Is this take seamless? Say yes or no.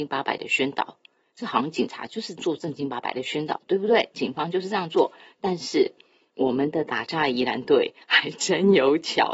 yes